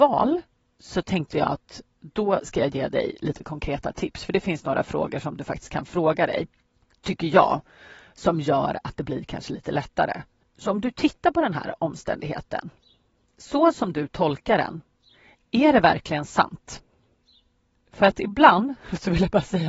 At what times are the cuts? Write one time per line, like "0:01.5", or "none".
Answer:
none